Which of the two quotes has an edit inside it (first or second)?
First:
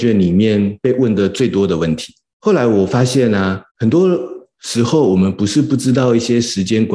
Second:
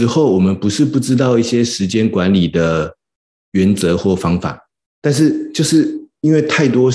first